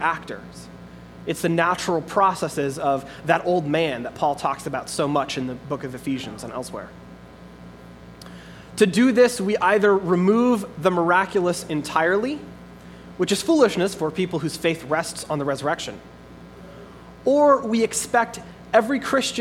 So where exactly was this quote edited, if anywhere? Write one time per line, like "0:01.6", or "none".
none